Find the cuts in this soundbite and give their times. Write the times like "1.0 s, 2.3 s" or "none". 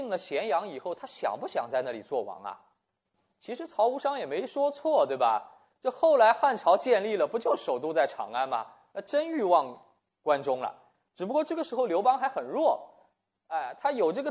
none